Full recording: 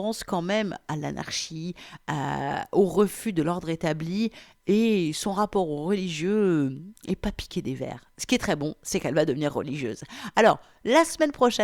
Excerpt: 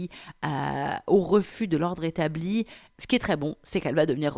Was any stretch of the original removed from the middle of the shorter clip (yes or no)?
yes